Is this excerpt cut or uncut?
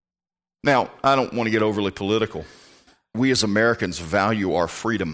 cut